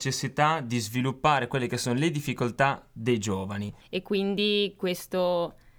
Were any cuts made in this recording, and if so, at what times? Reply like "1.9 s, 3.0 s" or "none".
3.8 s

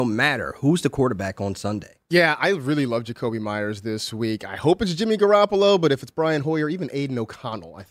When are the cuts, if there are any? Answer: none

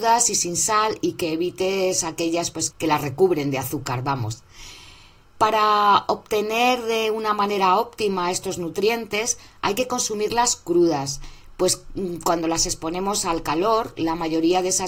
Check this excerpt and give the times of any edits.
2.7 s, 5.2 s

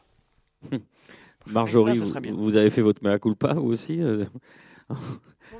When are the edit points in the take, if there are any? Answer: none

